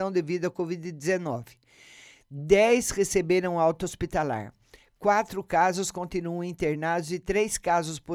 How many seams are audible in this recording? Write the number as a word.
zero